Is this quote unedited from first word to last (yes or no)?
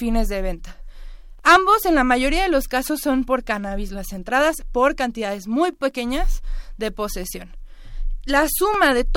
yes